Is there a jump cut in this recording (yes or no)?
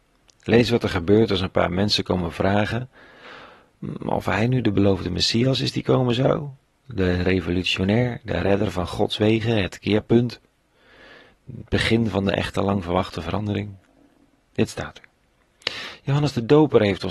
no